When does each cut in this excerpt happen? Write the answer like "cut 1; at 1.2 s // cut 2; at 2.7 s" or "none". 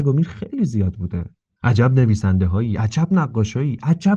cut 1; at 1.6 s